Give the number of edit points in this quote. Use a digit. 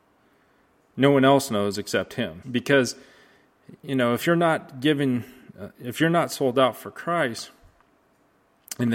2